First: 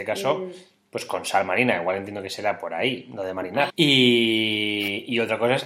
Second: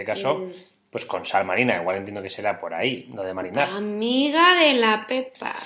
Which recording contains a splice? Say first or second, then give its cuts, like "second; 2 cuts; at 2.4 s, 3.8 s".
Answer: first; 1 cut; at 3.7 s